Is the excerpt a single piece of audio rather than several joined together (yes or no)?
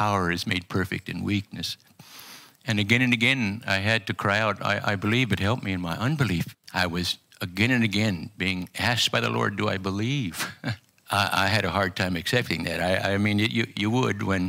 no